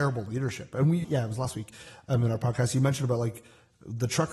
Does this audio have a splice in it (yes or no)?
yes